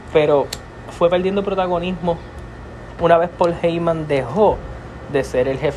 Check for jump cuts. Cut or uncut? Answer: uncut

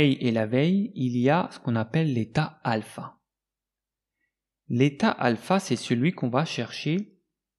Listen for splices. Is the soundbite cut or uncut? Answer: uncut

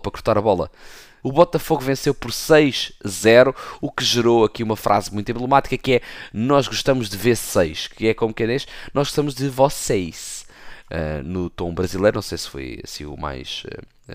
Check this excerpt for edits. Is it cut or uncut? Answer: cut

